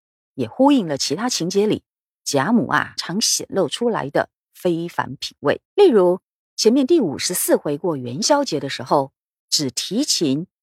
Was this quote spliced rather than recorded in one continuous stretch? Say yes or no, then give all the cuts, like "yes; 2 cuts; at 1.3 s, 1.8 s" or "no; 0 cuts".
yes; 3 cuts; at 3.0 s, 5.7 s, 9.4 s